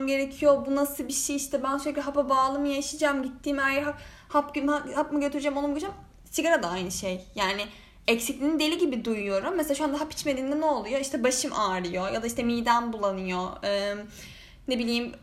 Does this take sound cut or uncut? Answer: uncut